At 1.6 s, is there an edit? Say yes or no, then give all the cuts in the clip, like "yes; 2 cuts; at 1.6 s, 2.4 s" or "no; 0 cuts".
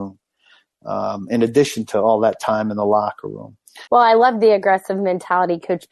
no; 1 cut; at 3.9 s